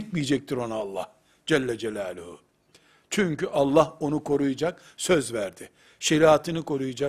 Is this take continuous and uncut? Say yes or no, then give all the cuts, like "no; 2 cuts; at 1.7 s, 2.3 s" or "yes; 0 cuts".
yes; 0 cuts